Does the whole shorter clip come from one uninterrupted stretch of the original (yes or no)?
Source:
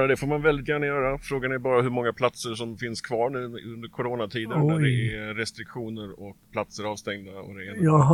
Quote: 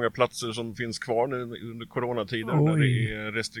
yes